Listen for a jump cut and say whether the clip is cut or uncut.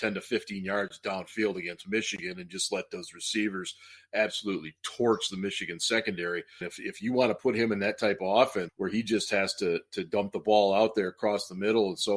cut